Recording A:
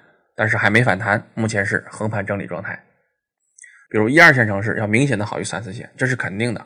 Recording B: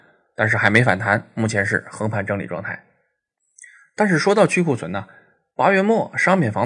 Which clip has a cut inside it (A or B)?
A